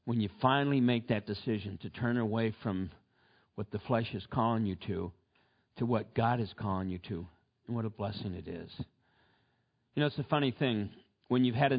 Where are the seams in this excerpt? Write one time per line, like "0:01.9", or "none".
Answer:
none